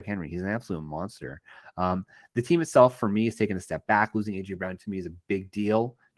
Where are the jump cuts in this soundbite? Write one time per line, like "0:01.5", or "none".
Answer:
none